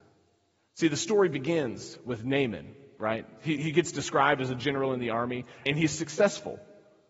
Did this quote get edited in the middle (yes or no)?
yes